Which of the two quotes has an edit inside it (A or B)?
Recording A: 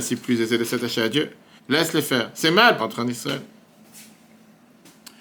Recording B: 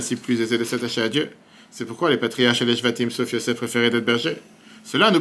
A